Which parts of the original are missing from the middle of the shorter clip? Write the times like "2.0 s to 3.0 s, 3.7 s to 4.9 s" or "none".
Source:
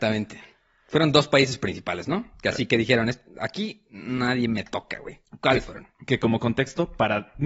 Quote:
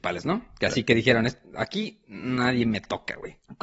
none